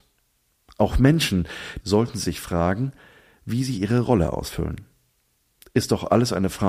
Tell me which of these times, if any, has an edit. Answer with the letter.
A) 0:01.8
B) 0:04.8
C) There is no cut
A